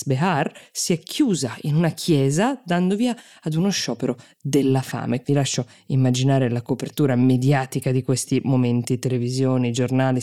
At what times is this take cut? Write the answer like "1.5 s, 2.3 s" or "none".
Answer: 5.2 s